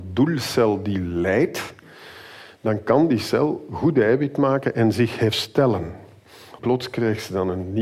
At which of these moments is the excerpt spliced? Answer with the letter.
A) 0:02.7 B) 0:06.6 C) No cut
B